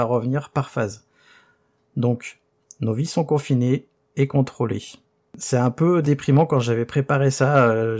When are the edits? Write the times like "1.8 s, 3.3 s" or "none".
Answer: none